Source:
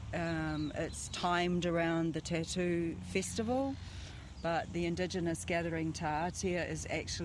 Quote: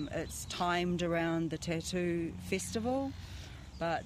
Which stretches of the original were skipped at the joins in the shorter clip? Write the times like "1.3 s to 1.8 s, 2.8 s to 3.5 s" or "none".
none